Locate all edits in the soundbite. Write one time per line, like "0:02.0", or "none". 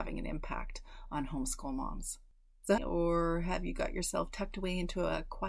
0:02.8